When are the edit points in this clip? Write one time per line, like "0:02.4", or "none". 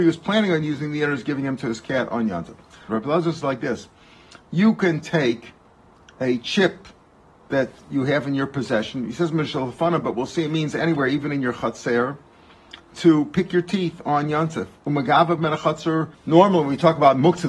0:02.9
0:16.1